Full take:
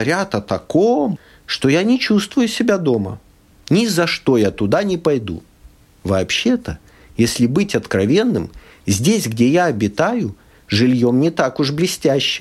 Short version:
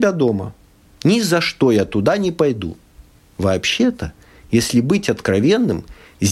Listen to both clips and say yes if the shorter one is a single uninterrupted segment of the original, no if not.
yes